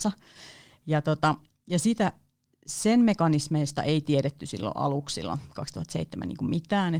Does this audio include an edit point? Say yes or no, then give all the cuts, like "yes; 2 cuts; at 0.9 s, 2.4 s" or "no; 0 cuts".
no; 0 cuts